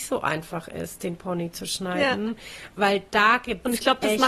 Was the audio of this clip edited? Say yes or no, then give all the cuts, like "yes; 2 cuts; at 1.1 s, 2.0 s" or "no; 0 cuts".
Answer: no; 0 cuts